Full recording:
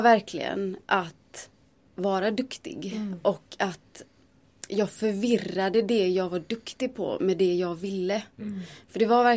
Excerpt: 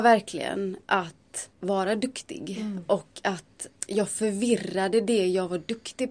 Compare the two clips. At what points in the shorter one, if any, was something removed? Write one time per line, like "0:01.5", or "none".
0:01.5
0:03.8